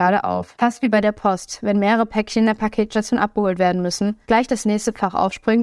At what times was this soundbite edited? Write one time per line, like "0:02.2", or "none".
0:04.3